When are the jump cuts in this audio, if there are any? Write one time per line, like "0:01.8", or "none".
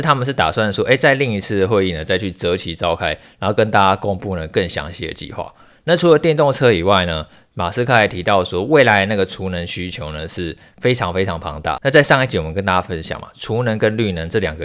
0:11.8